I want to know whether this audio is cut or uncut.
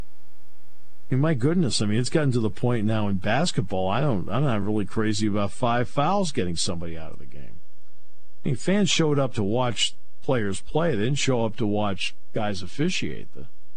uncut